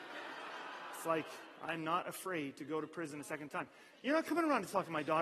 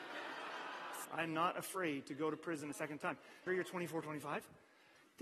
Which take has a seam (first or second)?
second